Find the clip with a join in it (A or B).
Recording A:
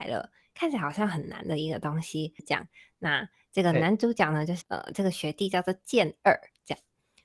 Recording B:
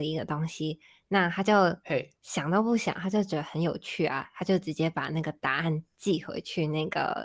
A